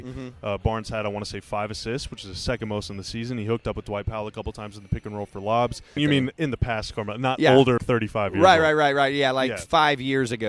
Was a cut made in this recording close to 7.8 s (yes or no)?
yes